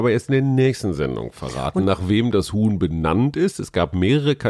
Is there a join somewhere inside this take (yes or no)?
no